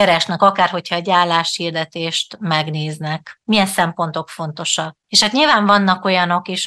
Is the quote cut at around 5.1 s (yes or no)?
yes